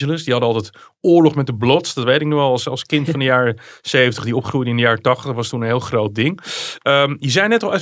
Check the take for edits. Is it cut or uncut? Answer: uncut